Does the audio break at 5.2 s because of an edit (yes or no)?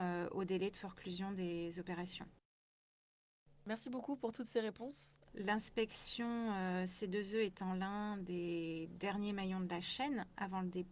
yes